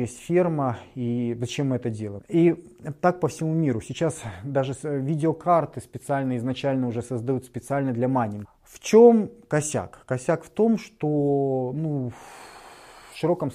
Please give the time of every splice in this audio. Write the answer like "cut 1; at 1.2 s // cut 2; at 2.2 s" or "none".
cut 1; at 2.2 s // cut 2; at 8.4 s